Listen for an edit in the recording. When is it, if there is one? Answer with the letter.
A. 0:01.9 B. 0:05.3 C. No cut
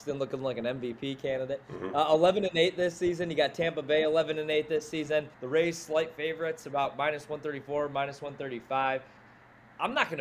B